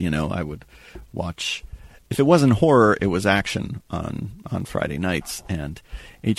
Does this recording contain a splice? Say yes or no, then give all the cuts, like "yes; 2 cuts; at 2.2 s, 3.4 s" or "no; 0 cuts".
no; 0 cuts